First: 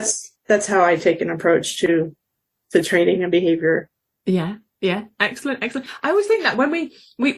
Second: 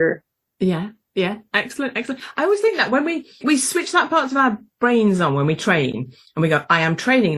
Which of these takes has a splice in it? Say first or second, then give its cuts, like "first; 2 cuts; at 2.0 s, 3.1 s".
second; 1 cut; at 3.4 s